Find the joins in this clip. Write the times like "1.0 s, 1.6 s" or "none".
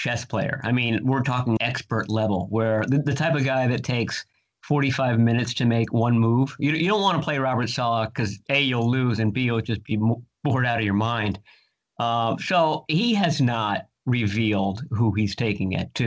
1.6 s